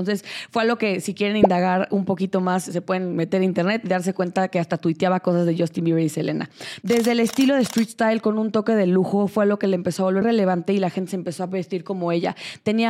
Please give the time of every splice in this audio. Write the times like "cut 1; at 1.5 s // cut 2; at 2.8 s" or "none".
cut 1; at 6.8 s // cut 2; at 10.2 s